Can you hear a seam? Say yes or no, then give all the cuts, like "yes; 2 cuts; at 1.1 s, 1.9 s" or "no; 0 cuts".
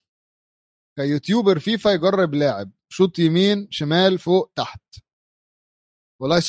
no; 0 cuts